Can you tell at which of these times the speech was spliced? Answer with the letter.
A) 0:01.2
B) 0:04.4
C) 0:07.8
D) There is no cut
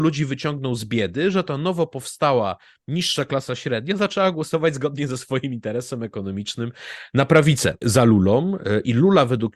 C